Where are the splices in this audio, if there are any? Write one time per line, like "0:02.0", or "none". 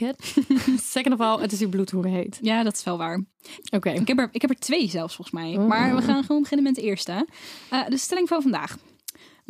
0:03.6